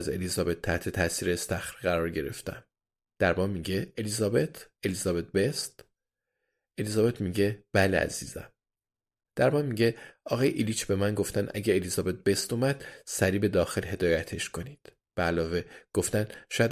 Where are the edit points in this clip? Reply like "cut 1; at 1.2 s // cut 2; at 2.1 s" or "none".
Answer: cut 1; at 9.3 s